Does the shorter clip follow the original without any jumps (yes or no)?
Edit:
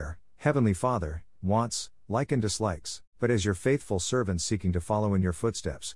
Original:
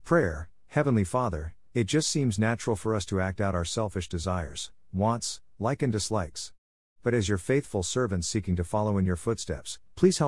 no